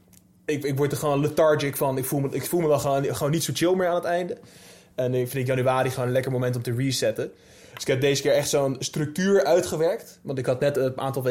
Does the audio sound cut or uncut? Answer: uncut